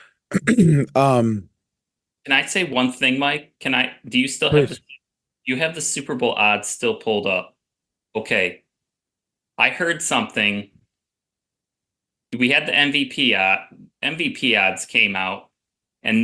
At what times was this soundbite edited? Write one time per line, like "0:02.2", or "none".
0:08.0

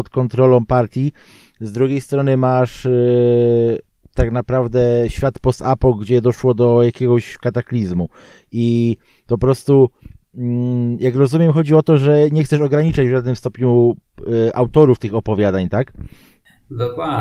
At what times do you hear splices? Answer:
none

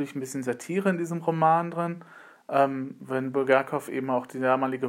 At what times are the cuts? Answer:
none

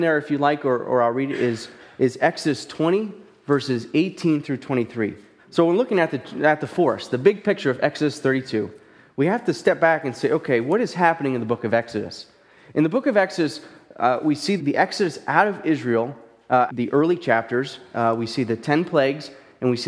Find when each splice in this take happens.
0:05.4
0:14.6
0:16.7

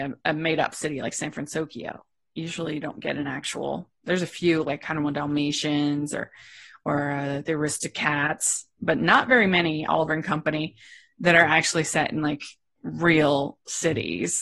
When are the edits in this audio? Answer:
none

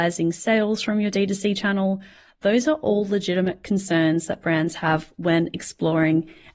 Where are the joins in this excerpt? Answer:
none

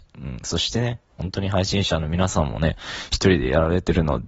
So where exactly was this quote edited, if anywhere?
none

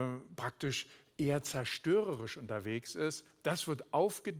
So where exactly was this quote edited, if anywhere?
none

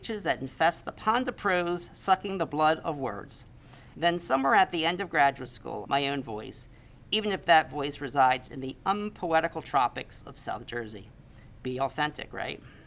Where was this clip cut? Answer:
0:03.9
0:05.8

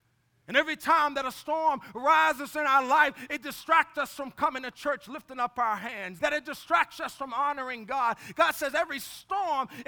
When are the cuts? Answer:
0:06.2

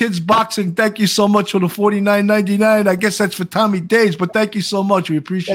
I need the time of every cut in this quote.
none

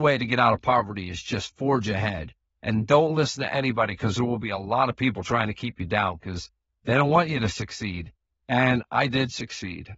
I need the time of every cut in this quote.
none

